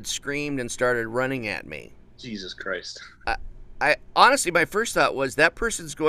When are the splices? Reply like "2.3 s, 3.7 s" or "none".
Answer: 3.2 s